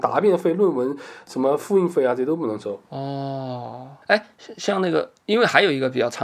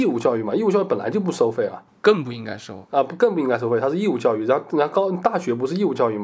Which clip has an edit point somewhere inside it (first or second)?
first